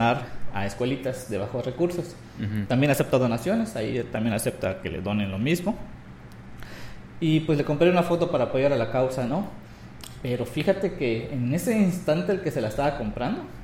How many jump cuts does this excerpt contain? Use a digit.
0